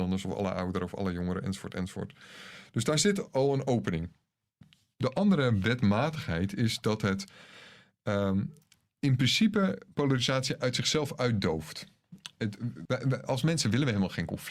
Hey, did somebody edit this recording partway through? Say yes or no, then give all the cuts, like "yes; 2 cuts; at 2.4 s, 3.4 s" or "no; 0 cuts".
yes; 1 cut; at 12.9 s